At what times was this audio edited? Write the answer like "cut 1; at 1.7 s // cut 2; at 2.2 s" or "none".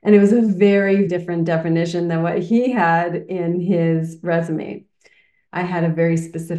cut 1; at 1.1 s // cut 2; at 5.5 s